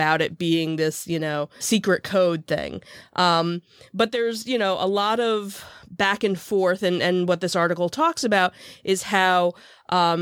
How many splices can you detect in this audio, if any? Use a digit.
1